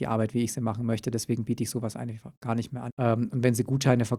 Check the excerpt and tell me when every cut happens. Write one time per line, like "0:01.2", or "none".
0:02.9